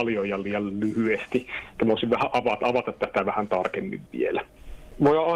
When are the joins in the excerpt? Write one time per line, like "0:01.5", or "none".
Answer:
none